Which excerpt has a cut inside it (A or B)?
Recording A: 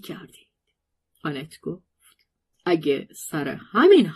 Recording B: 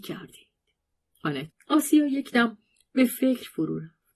B